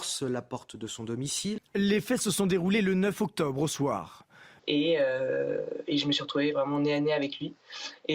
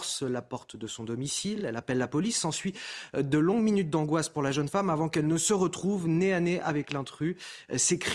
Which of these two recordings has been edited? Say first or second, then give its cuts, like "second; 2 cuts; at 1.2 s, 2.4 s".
first; 2 cuts; at 1.6 s, 4.6 s